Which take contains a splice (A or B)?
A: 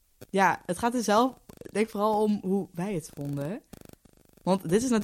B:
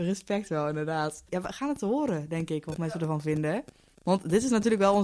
B